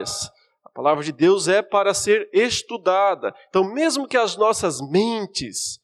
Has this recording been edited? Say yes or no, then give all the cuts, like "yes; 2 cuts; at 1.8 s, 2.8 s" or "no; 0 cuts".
no; 0 cuts